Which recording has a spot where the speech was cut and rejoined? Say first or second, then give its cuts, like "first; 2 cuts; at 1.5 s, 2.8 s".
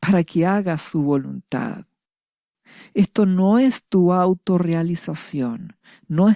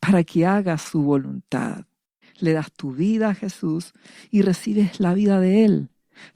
second; 1 cut; at 2.2 s